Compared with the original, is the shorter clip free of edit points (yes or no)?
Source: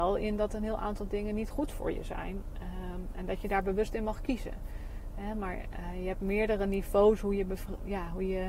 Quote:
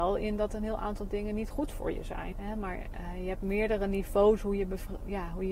no